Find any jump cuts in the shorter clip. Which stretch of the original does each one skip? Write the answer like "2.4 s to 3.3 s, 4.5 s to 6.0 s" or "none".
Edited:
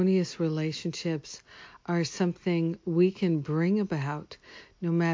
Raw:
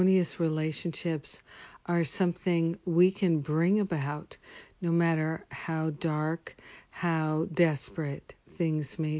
none